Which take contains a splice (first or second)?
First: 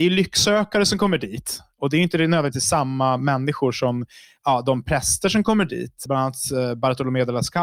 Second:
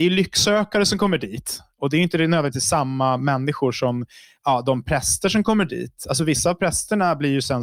first